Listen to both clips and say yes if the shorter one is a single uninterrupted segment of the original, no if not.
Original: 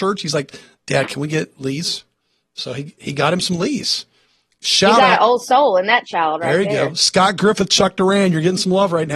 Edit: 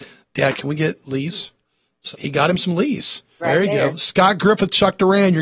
no